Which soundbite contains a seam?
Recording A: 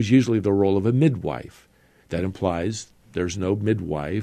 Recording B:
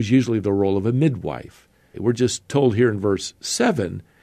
B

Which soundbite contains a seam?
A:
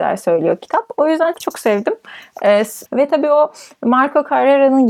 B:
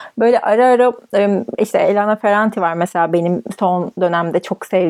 A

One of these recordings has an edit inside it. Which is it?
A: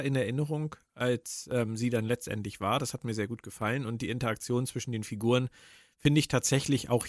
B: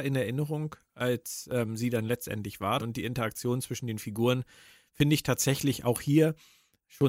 B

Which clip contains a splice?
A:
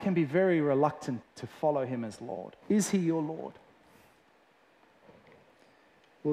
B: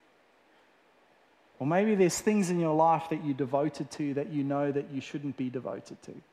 A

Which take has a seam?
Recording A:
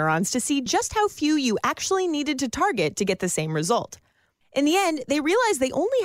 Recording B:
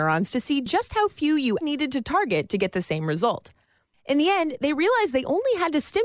B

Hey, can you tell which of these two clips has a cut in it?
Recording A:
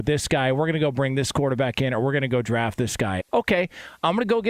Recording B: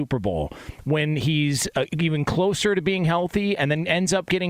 A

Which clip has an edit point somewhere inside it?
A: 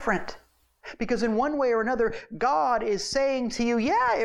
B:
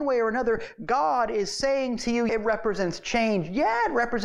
B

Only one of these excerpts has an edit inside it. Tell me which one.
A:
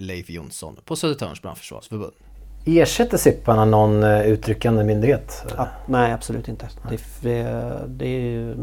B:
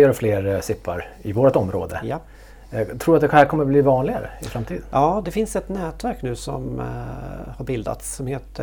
B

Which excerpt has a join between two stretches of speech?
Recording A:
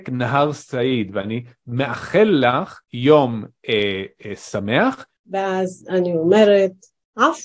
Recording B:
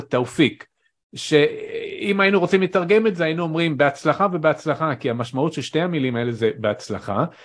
A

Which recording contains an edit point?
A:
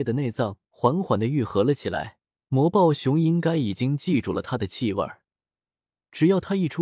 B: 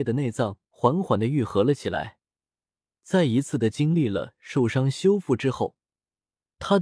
A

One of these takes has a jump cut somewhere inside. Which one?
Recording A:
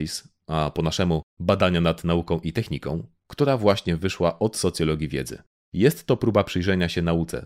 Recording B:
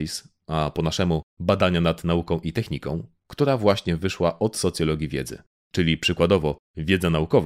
B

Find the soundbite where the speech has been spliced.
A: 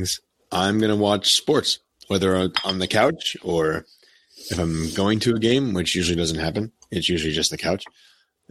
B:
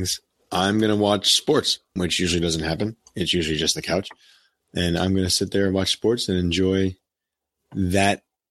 B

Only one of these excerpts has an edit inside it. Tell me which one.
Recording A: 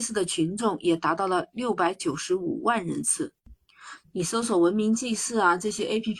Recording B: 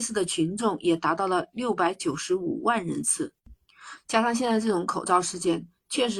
A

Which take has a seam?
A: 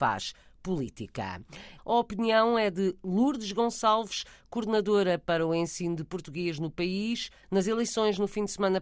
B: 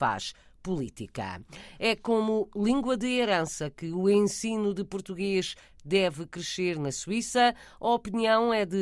A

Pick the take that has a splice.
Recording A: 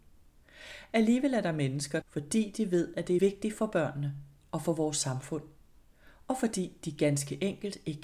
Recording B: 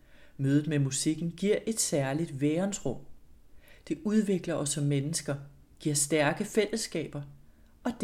A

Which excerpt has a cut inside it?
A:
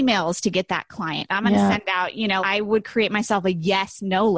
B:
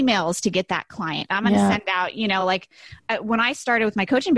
A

